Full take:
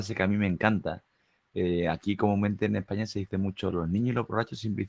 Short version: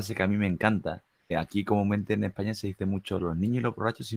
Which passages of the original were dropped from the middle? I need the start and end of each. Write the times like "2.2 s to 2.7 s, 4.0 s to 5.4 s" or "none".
1.3 s to 1.8 s